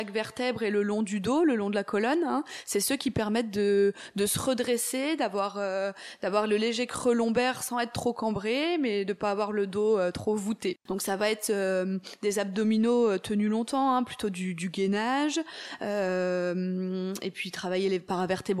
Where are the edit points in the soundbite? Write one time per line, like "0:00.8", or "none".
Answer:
0:10.9